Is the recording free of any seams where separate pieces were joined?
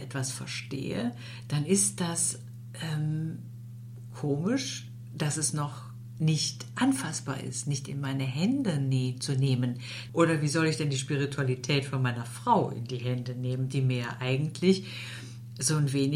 no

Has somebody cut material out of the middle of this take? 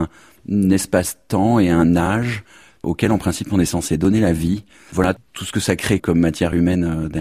yes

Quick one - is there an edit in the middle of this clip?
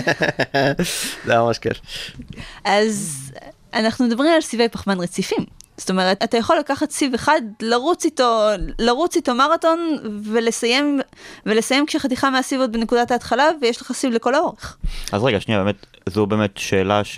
yes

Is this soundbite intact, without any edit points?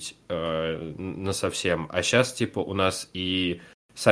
yes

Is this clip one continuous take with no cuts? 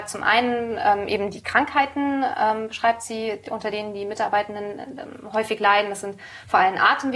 yes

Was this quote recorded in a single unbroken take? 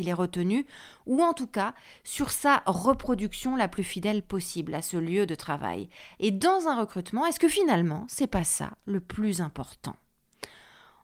yes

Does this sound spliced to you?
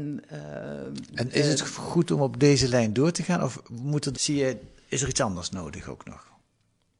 yes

